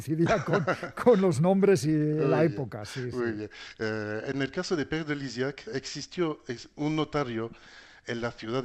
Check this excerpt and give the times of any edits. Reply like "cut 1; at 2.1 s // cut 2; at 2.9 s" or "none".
cut 1; at 5.7 s